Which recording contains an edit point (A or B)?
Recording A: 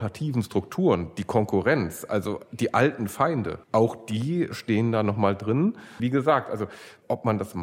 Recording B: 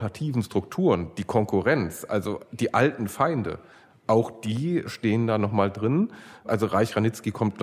A